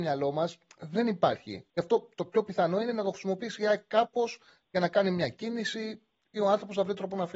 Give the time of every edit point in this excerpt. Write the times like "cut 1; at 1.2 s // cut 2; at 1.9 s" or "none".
cut 1; at 1.7 s